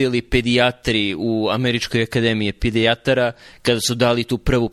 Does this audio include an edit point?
no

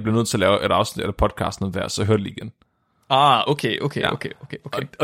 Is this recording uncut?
yes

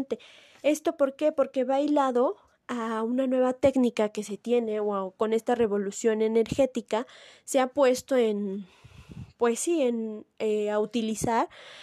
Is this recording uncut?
yes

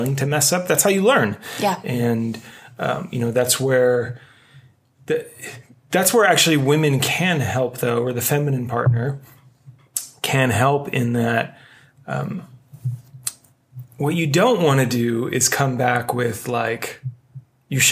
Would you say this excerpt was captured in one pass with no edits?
yes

